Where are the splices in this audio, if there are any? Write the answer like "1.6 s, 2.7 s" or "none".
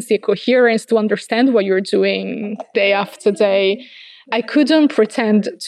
none